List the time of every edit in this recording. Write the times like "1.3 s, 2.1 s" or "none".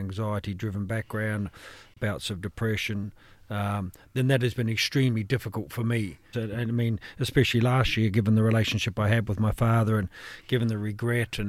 6.3 s